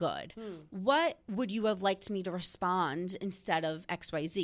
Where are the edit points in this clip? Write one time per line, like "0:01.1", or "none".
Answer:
0:01.2